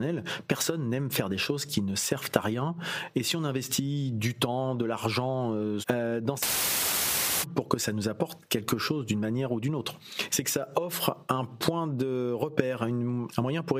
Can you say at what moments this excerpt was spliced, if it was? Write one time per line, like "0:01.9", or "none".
0:05.8
0:10.3